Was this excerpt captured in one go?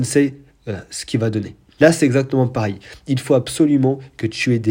no; 1 cut; at 1.8 s

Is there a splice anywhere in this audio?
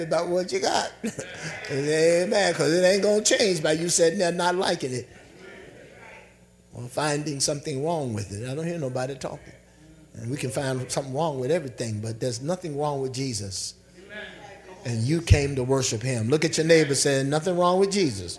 no; 0 cuts

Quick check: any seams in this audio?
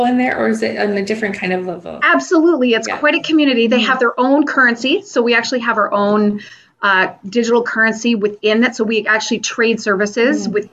no; 0 cuts

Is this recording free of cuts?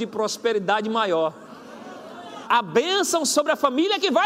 no; 1 cut; at 2.4 s

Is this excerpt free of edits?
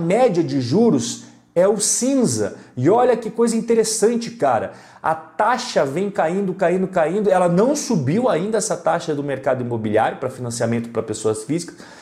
yes; 0 cuts

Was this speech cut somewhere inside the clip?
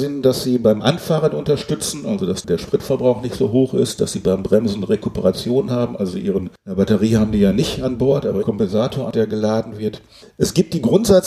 no; 0 cuts

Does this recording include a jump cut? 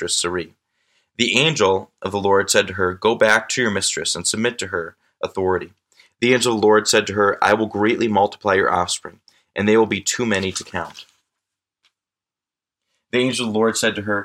no; 0 cuts

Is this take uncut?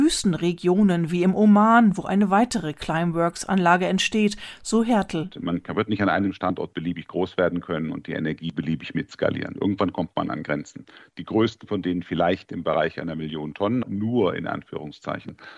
no; 2 cuts; at 11.0 s, 13.8 s

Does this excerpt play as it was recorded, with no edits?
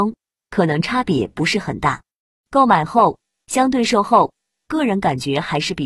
no; 1 cut; at 2.3 s

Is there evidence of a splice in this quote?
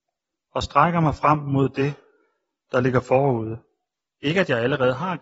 yes; 1 cut; at 4.1 s

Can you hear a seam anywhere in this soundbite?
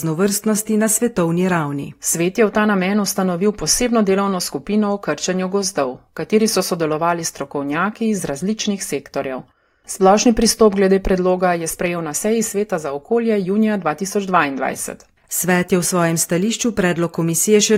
no; 0 cuts

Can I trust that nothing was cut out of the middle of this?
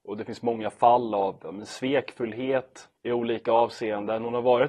no; 1 cut; at 3.0 s

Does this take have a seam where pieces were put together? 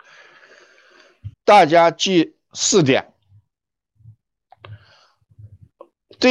yes; 1 cut; at 1.3 s

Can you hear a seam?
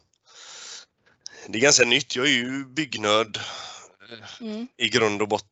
no; 0 cuts

